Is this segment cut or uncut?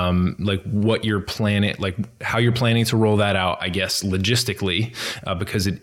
uncut